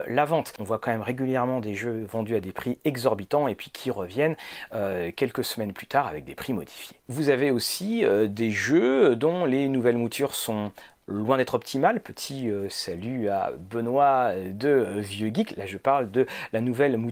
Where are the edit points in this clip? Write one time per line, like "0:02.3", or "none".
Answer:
0:07.1